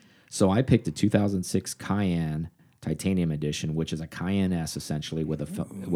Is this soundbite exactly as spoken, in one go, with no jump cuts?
yes; 0 cuts

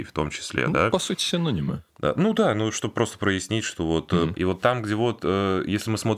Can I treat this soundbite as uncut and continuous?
no; 2 cuts; at 1.9 s, 4.3 s

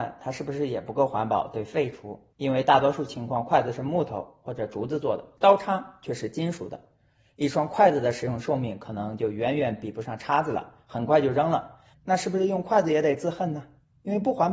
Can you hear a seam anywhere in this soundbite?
yes; 1 cut; at 2.3 s

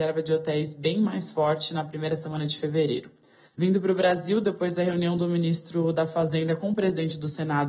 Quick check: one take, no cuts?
no; 1 cut; at 3.5 s

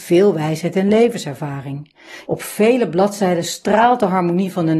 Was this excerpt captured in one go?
no; 1 cut; at 2.3 s

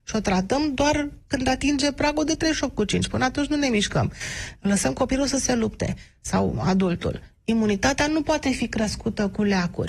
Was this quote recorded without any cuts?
yes; 0 cuts

